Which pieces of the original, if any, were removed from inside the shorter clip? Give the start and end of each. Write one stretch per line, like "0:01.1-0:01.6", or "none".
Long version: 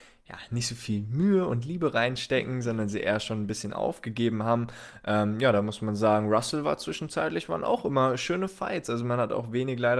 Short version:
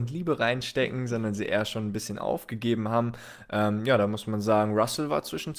none